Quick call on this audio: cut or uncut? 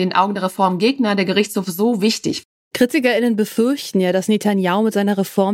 uncut